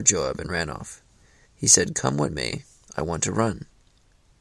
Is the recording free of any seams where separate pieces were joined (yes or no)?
no